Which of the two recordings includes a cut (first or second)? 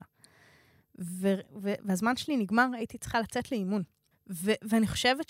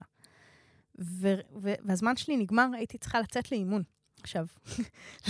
first